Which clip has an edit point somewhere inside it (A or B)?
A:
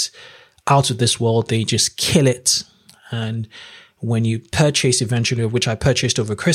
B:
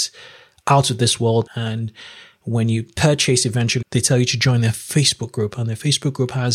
B